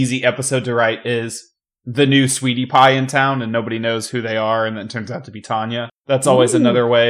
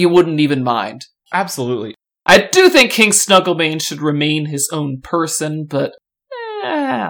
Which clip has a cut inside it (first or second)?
first